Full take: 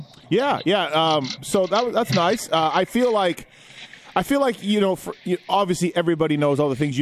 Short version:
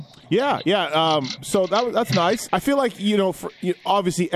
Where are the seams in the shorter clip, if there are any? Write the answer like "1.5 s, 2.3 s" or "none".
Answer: 2.5 s